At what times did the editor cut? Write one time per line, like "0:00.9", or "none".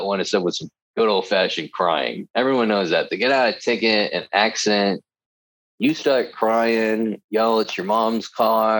none